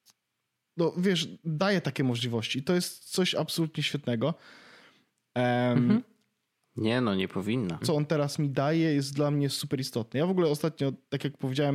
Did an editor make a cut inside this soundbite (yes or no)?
yes